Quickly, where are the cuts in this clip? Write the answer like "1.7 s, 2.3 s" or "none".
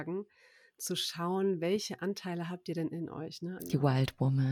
3.6 s